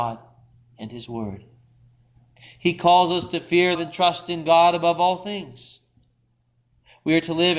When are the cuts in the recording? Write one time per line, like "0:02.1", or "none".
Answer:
0:03.8